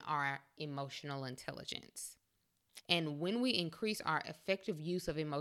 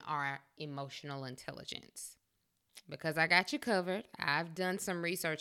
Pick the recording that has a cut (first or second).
first